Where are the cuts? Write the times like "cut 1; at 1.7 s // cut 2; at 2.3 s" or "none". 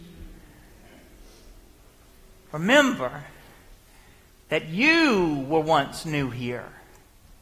none